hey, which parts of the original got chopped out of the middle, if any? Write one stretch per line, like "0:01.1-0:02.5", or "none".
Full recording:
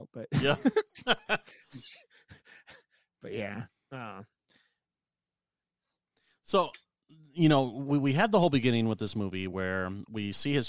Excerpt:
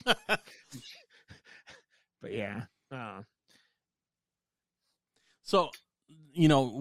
none